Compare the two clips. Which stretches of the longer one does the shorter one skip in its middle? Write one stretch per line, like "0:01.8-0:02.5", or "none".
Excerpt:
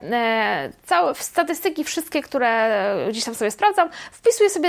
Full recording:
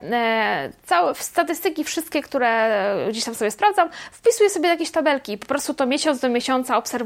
none